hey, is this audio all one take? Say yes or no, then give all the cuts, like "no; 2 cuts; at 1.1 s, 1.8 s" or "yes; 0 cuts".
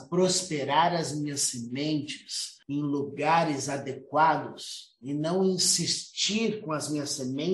no; 1 cut; at 2.6 s